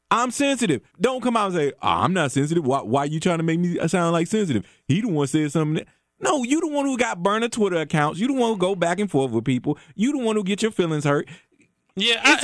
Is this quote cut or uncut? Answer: cut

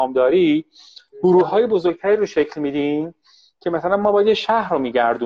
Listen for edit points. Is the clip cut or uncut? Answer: uncut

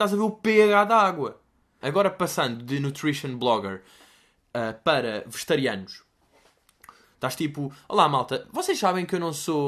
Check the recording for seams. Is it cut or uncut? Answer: cut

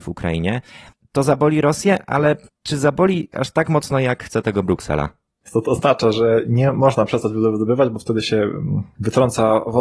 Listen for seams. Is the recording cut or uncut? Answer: cut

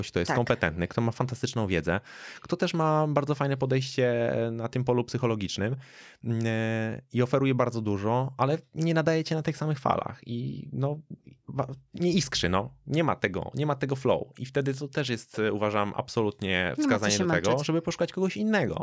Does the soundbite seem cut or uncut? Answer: uncut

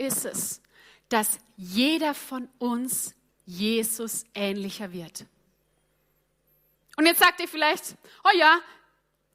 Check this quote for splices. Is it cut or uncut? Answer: cut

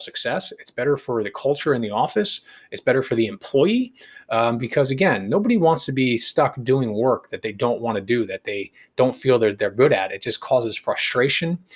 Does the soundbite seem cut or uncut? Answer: uncut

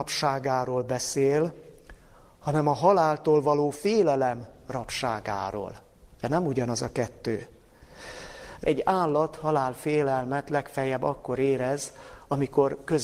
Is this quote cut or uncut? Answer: cut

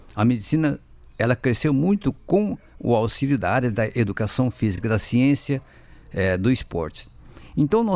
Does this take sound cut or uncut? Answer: uncut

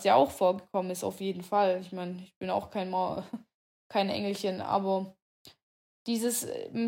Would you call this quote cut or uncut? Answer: uncut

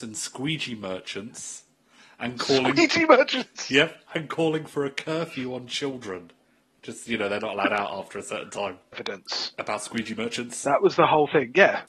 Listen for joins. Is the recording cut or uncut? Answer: cut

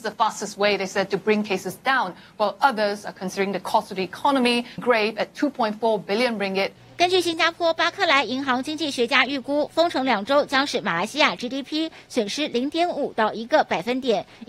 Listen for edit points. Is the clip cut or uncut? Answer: cut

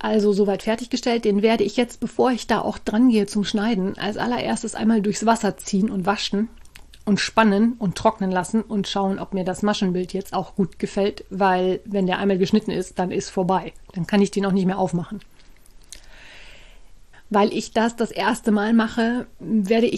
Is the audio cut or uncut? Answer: cut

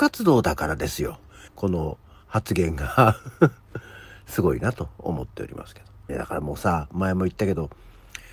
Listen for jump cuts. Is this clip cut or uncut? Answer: cut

